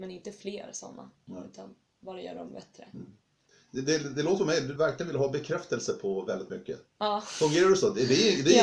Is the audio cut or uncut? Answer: cut